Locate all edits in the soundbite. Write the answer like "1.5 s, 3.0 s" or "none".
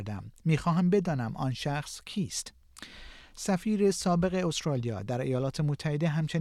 none